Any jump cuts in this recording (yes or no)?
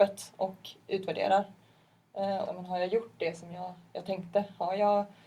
yes